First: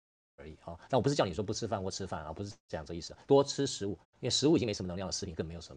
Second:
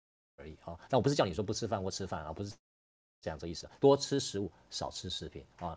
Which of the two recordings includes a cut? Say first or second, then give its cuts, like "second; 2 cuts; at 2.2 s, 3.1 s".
first; 2 cuts; at 2.6 s, 4.0 s